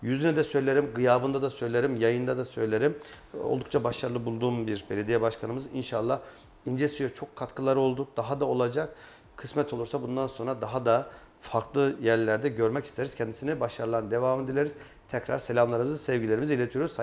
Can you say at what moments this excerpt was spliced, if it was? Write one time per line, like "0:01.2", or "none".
none